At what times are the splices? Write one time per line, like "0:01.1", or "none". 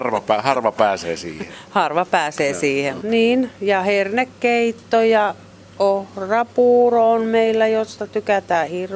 0:03.0